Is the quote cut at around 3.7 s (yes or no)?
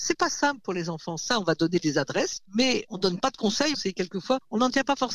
yes